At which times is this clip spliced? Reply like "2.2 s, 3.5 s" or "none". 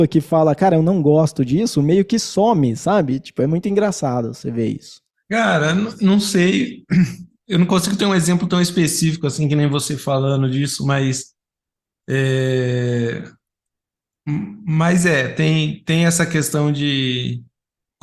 5.2 s